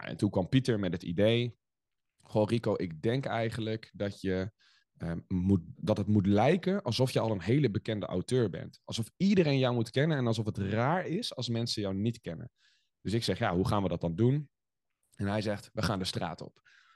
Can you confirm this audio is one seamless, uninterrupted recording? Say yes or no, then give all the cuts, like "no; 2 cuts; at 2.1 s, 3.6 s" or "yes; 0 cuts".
no; 1 cut; at 5.7 s